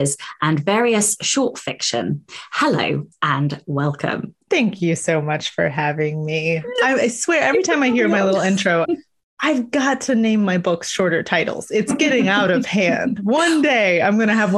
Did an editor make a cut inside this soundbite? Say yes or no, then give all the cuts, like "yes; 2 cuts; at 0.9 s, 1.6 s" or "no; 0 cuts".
yes; 1 cut; at 8.8 s